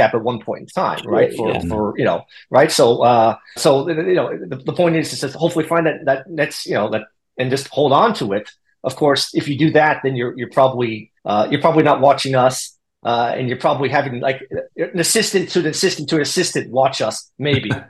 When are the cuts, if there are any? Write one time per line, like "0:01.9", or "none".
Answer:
0:03.6
0:11.2